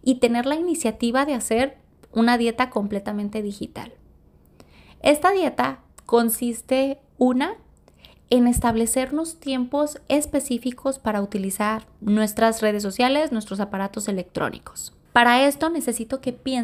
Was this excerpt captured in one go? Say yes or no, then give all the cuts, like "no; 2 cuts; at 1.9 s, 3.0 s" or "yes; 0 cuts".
no; 1 cut; at 15.0 s